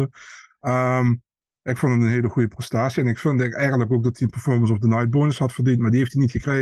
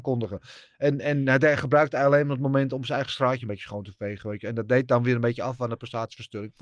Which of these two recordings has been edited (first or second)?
first